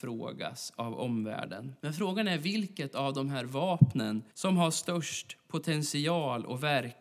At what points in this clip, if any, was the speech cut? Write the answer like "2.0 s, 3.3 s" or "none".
1.8 s, 4.3 s